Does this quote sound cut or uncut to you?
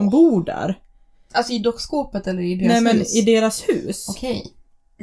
uncut